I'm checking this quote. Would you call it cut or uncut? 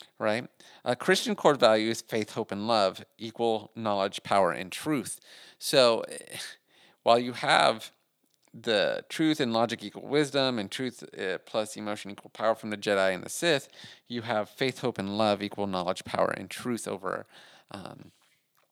uncut